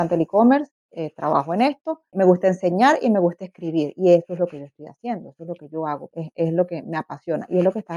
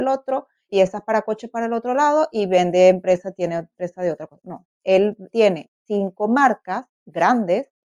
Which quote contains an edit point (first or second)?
first